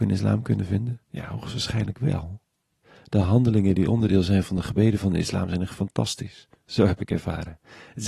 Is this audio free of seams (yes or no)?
yes